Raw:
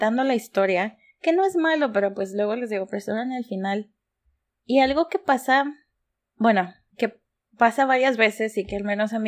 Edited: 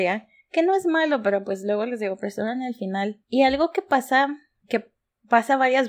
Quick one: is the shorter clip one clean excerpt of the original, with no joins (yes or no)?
no